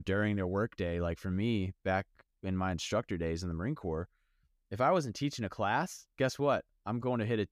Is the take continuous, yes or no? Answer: yes